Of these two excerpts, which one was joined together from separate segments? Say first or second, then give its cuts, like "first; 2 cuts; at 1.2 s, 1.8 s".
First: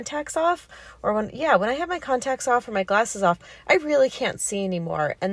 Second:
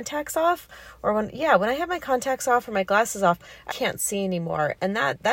second; 1 cut; at 3.7 s